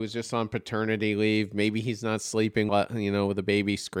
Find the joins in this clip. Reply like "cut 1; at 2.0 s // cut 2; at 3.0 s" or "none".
cut 1; at 2.7 s